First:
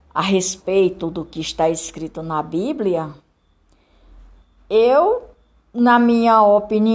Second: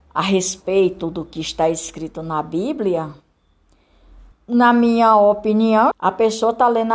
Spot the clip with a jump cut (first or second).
second